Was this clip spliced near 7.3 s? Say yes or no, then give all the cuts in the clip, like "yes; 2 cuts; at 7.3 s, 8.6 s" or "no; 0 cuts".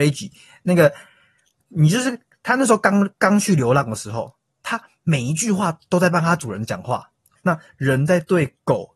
yes; 1 cut; at 7.3 s